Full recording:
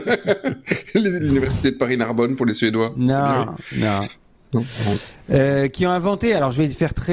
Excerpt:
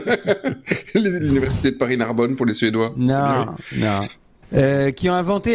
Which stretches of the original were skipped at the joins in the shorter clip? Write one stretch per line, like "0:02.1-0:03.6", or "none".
0:04.4-0:05.2

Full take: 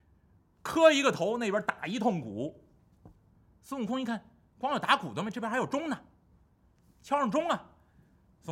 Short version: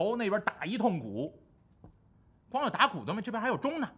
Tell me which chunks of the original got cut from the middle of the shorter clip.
0:03.5-0:04.4

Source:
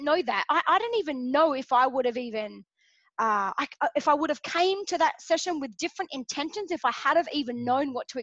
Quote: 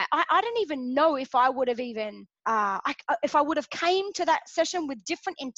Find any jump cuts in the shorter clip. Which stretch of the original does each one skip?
0:02.7-0:03.1

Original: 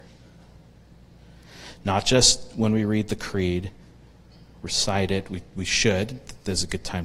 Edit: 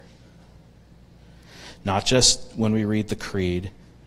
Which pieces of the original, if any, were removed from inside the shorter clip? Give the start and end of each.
none

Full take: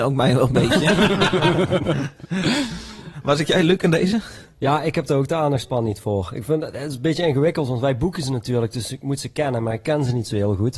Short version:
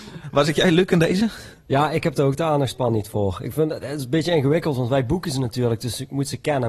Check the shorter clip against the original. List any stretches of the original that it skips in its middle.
none

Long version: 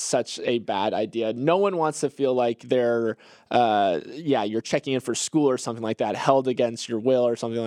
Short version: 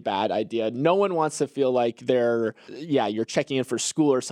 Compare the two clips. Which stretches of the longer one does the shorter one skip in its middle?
0:03.3-0:04.0

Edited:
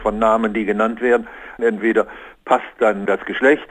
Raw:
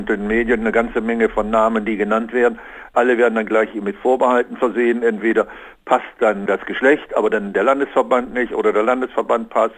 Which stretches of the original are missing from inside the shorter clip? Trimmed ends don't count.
0:02.9-0:05.0

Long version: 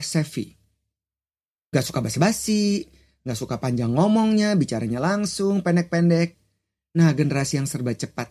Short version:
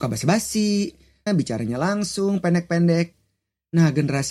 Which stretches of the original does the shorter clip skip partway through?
0:03.2-0:04.5

